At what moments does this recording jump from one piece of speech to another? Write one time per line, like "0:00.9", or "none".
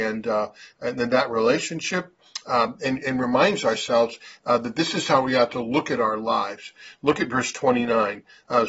none